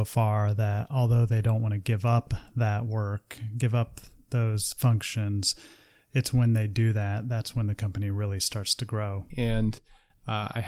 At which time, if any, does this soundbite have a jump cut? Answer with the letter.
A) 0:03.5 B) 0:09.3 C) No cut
B